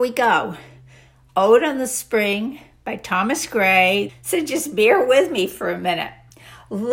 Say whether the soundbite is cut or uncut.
cut